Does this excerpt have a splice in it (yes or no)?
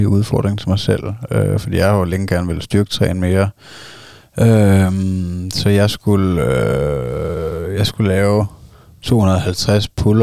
no